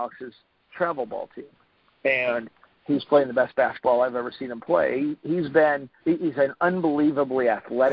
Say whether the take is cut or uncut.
cut